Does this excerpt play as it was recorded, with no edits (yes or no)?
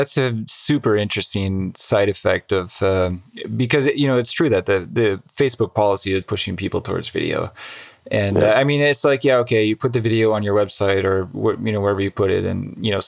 no